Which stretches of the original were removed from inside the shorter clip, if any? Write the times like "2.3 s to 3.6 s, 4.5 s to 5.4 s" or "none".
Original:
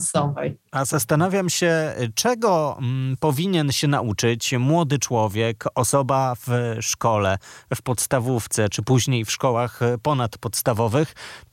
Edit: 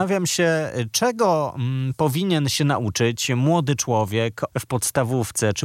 5.7 s to 7.6 s